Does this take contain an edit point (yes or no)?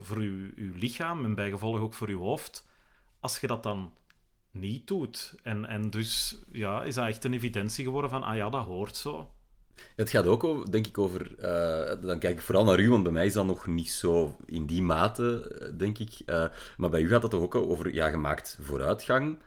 no